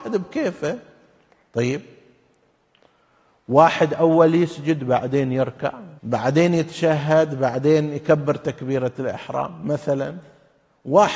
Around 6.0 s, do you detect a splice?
yes; 1 cut; at 6.0 s

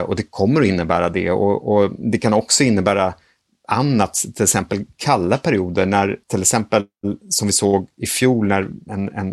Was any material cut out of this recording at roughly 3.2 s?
no; 1 cut; at 6.2 s

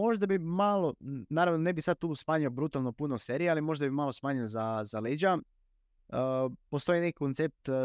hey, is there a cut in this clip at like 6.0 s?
yes; 1 cut; at 6.0 s

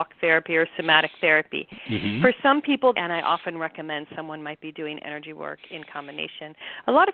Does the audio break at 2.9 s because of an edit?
yes; 1 cut; at 2.9 s

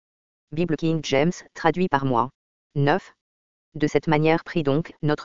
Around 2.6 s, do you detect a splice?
yes; 1 cut; at 2.6 s

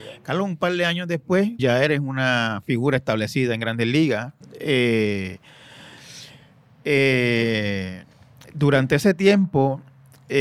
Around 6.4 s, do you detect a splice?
no; 2 cuts; at 1.6 s, 4.4 s

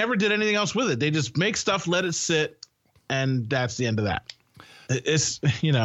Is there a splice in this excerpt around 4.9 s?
yes; 1 cut; at 4.9 s

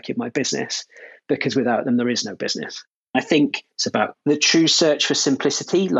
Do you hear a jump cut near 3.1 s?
yes; 1 cut; at 3.1 s

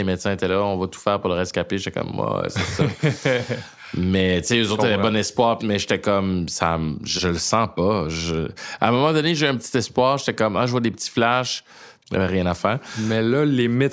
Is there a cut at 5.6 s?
yes; 3 cuts; at 5.6 s, 7.2 s, 12.0 s

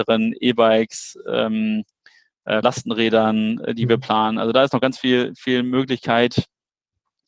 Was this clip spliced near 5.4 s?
no; 1 cut; at 2.6 s

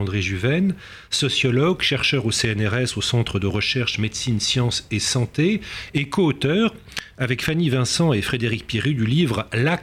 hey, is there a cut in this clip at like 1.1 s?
no; 0 cuts

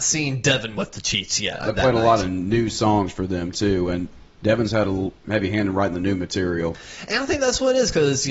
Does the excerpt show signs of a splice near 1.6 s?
yes; 1 cut; at 1.6 s

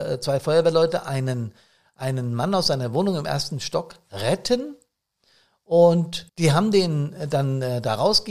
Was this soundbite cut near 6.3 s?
yes; 1 cut; at 6.3 s

